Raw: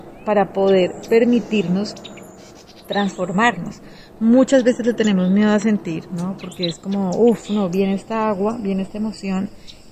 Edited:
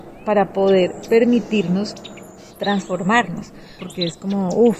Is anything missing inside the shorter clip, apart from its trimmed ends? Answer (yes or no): yes